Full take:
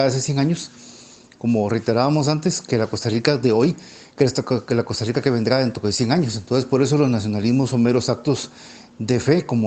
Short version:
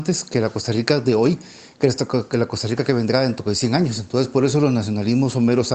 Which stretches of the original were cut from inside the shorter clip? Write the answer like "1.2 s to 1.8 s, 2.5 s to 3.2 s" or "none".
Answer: none